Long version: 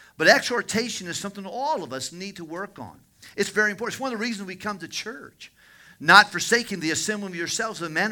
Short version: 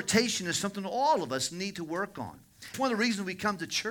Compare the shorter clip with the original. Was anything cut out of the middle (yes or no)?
yes